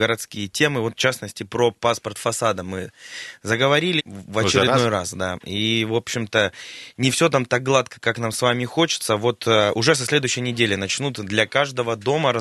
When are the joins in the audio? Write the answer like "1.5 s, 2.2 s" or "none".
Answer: 4.0 s